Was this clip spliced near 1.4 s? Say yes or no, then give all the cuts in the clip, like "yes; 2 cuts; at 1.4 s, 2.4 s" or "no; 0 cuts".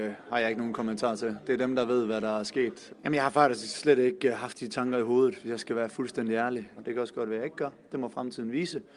no; 2 cuts; at 2.9 s, 6.8 s